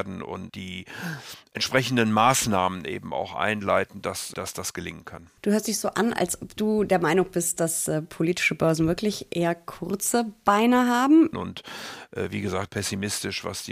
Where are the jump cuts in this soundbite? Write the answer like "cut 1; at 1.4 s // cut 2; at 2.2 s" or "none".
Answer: cut 1; at 11.3 s // cut 2; at 12.7 s